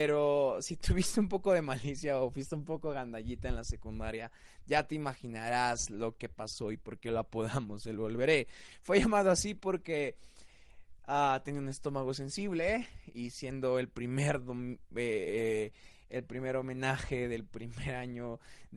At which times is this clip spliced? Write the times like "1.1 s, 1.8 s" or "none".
none